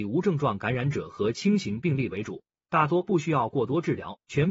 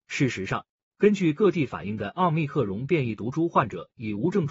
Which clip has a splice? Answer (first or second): second